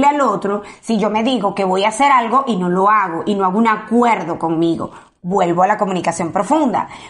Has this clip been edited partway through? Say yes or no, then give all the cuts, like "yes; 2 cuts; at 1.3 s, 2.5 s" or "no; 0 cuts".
no; 0 cuts